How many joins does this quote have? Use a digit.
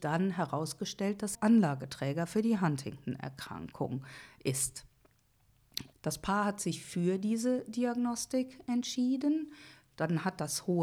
2